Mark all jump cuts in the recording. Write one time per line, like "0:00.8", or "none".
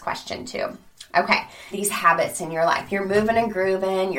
0:01.7

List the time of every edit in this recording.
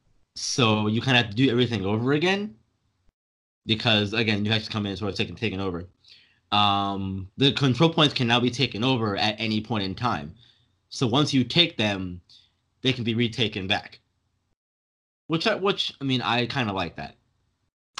0:07.3

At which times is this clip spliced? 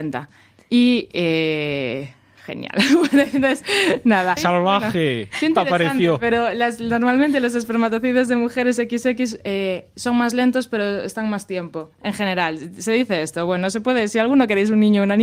0:04.4

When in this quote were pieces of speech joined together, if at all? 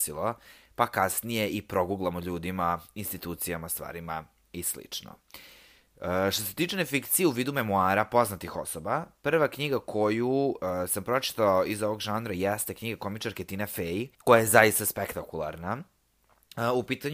0:14.1

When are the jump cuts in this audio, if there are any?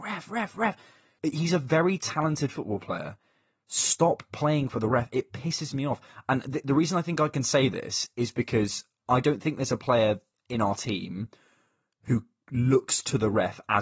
0:01.2

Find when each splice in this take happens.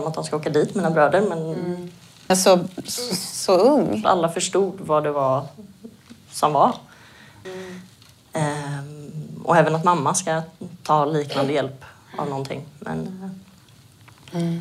0:02.3
0:04.0
0:07.4

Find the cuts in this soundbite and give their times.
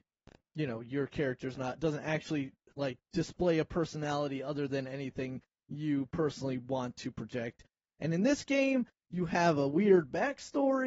none

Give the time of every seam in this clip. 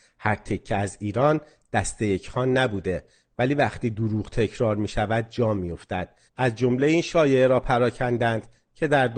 0:06.3

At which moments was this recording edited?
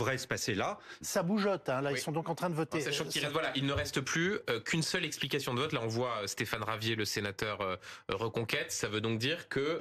0:01.0

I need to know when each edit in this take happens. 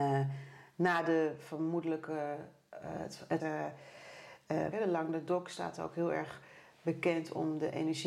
0:03.4
0:04.7

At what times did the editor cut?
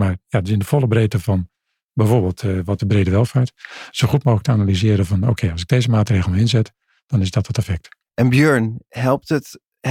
0:02.8

